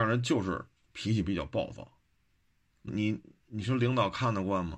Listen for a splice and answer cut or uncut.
cut